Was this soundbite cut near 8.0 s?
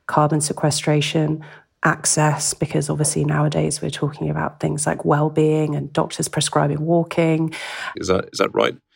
yes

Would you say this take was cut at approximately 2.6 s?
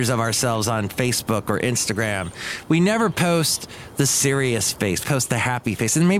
no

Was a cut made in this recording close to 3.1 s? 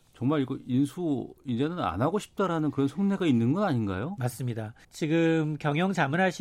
no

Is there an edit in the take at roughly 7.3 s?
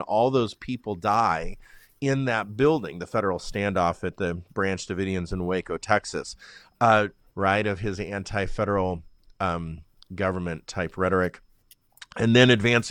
yes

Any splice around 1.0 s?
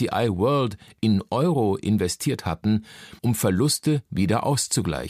no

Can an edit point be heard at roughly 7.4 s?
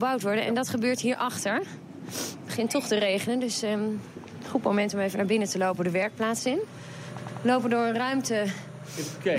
no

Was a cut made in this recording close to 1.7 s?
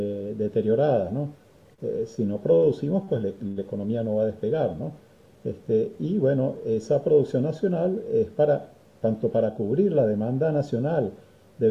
yes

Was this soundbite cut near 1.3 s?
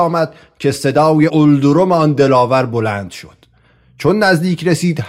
yes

